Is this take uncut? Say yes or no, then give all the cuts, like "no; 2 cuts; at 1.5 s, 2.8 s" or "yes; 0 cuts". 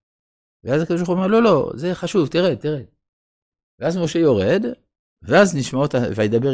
yes; 0 cuts